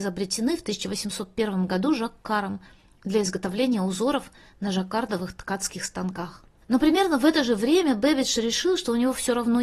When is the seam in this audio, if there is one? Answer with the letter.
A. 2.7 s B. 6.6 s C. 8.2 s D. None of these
B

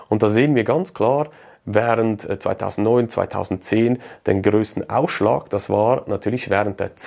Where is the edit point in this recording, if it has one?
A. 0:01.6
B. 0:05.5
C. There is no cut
C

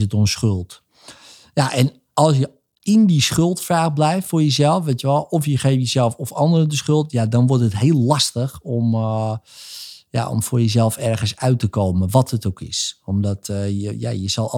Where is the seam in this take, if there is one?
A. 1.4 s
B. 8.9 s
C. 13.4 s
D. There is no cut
D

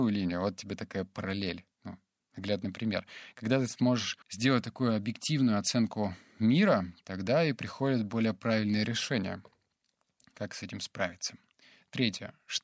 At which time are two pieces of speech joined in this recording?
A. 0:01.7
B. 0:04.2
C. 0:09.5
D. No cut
B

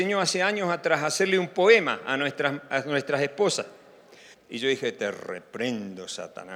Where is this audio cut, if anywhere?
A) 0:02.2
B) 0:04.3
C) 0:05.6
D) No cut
B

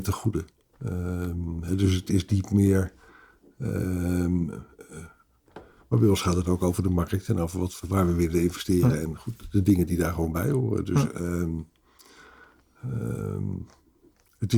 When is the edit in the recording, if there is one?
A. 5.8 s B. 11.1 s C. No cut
A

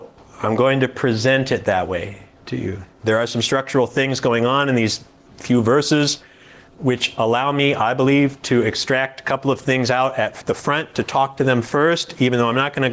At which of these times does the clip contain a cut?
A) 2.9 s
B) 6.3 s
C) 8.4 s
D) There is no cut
A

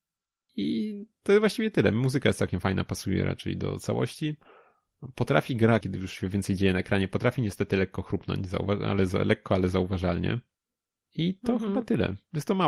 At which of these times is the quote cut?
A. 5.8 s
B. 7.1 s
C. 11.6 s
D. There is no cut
A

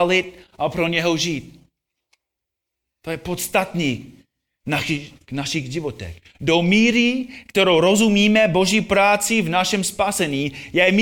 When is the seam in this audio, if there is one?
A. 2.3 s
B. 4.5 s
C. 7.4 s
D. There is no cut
D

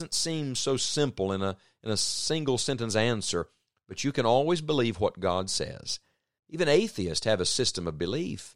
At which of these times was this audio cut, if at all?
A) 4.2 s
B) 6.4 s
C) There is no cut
B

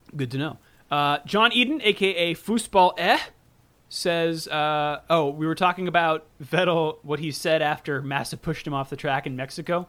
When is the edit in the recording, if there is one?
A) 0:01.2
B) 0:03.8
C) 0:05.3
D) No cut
D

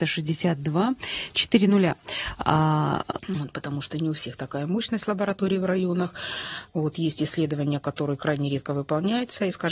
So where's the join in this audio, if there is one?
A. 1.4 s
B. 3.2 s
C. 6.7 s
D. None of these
B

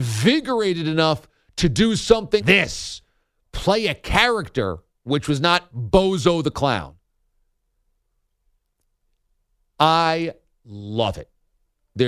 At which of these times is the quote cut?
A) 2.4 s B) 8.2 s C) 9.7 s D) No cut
A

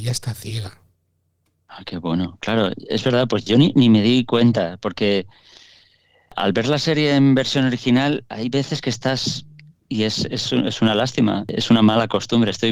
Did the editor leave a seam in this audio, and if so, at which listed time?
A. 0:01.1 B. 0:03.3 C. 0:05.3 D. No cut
D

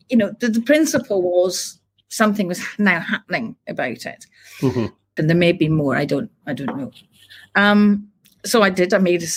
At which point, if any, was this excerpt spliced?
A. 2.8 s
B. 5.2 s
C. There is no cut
B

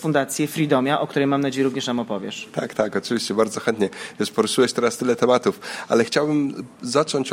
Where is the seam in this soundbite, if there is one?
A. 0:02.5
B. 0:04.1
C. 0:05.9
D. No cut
D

